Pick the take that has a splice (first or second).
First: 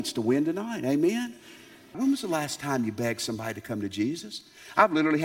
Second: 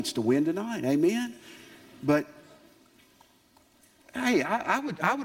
first